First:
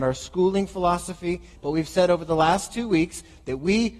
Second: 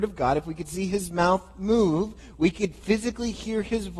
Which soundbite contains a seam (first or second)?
first